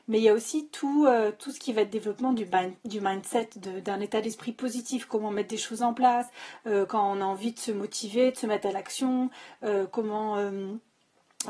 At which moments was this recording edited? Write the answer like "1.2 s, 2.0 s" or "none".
none